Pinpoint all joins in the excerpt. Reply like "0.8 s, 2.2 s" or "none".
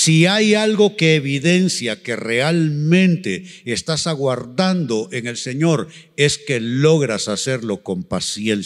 none